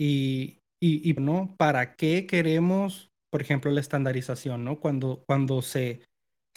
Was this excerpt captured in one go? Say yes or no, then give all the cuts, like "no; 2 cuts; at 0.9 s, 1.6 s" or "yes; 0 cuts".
no; 1 cut; at 1.2 s